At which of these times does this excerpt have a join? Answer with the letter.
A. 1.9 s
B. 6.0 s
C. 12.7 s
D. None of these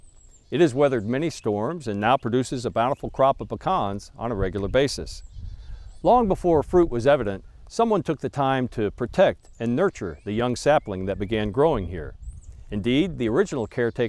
D